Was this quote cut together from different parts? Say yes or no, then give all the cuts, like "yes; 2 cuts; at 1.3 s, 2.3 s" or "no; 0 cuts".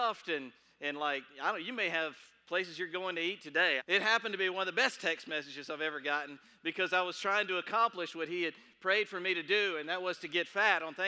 yes; 1 cut; at 3.8 s